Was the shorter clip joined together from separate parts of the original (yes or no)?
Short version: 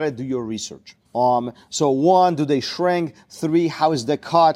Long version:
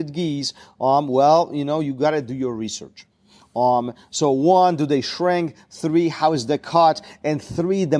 yes